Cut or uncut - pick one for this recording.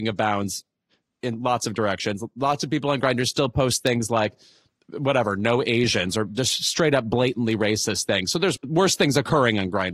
cut